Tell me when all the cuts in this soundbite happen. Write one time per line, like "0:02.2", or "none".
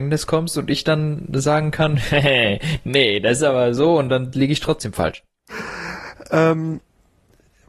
0:05.5